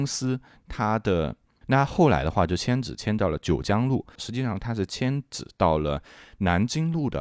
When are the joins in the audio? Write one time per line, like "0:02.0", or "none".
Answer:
0:01.6
0:04.2